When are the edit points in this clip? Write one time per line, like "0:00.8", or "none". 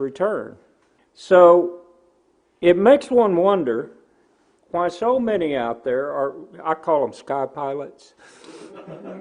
0:01.0